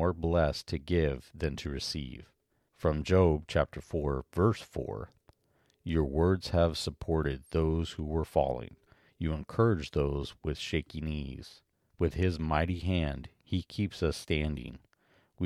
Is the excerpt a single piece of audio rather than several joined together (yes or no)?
no